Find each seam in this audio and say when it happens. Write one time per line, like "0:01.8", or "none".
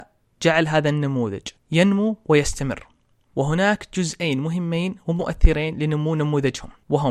none